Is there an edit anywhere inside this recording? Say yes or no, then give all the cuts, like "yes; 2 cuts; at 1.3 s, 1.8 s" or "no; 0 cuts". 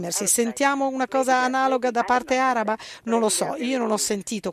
no; 0 cuts